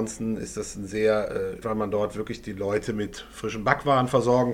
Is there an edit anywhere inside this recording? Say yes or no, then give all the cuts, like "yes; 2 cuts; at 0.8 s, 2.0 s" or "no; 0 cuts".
yes; 1 cut; at 1.6 s